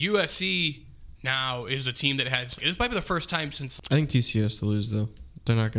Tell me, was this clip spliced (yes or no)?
yes